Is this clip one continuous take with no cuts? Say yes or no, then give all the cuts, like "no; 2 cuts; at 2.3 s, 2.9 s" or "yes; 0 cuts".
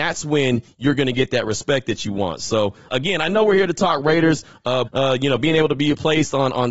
no; 2 cuts; at 2.9 s, 4.9 s